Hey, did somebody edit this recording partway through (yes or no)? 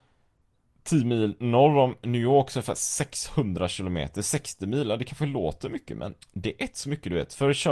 yes